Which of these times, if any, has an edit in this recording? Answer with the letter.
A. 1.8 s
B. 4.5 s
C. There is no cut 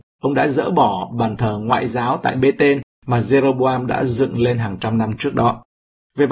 C